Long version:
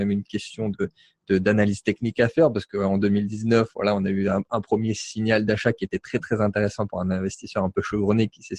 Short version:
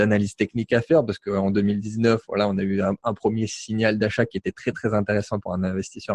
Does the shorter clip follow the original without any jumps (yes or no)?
yes